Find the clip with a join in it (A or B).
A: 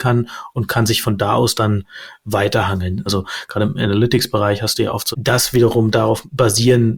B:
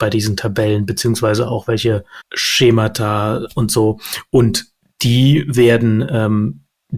A